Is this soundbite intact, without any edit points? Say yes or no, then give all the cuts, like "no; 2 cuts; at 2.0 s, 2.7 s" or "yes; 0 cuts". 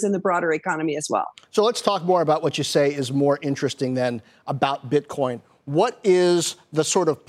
yes; 0 cuts